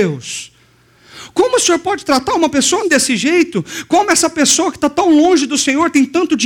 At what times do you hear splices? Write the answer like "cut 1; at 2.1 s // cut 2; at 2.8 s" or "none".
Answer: cut 1; at 2.8 s